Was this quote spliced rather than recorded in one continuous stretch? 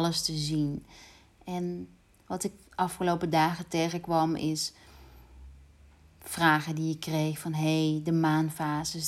no; 0 cuts

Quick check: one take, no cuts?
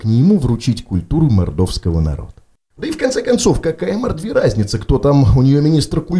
yes; 0 cuts

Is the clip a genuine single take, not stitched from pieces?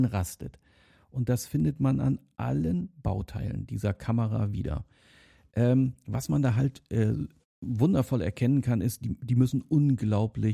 yes; 0 cuts

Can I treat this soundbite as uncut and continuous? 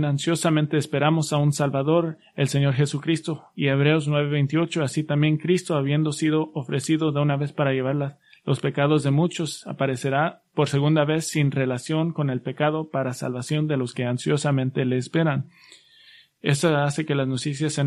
yes; 0 cuts

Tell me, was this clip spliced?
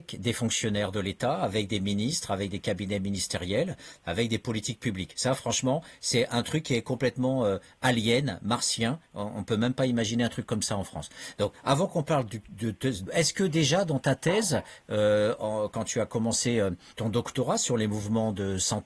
yes; 1 cut; at 13.1 s

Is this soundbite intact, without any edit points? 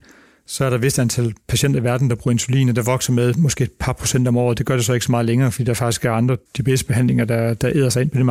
no; 1 cut; at 6.5 s

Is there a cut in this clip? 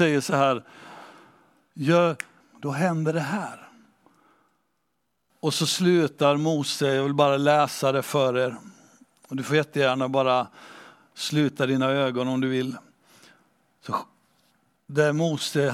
yes; 2 cuts; at 2.4 s, 5.3 s

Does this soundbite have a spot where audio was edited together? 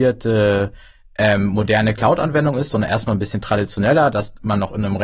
no; 0 cuts

